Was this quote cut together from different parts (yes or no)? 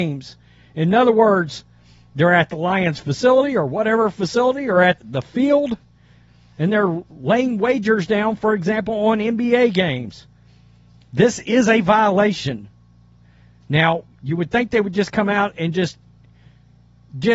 yes